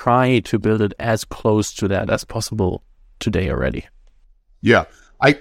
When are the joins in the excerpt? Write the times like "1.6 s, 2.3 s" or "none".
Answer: none